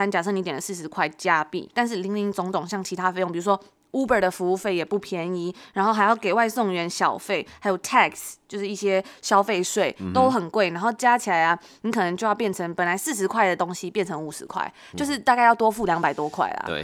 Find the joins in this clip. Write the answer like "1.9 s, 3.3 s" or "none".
none